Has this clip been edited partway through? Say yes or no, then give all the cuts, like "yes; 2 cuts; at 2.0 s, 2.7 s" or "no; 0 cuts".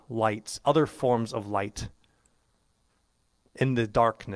no; 0 cuts